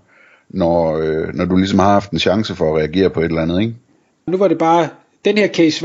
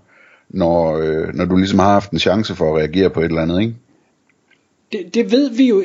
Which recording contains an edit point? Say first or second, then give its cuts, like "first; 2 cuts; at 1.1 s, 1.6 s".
first; 1 cut; at 4.3 s